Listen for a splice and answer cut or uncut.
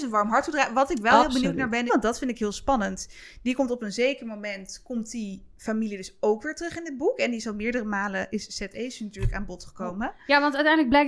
cut